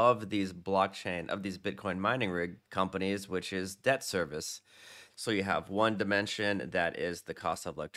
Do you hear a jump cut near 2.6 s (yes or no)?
yes